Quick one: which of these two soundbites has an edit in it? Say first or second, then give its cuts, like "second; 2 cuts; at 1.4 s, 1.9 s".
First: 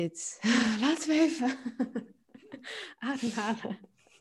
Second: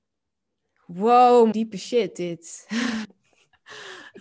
second; 2 cuts; at 1.5 s, 3.0 s